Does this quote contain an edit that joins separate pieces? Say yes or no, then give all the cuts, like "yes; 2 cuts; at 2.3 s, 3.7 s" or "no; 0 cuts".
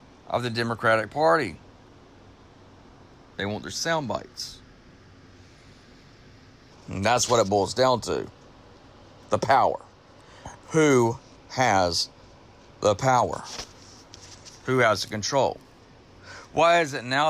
yes; 2 cuts; at 3.3 s, 6.7 s